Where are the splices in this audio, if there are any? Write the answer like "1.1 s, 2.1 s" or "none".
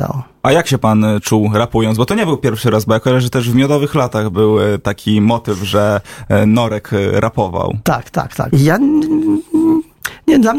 8.5 s